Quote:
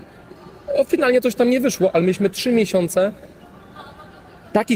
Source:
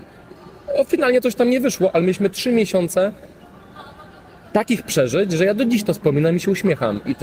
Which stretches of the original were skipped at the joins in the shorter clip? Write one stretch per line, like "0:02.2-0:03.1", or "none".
none